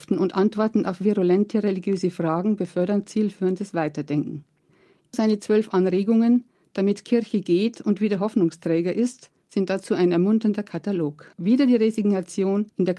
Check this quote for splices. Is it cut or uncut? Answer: uncut